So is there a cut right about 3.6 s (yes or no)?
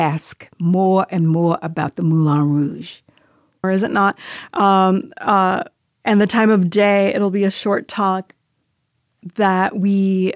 yes